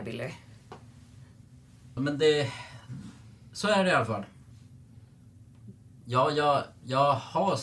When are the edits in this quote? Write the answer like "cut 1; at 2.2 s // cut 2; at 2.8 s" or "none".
cut 1; at 2.0 s // cut 2; at 6.0 s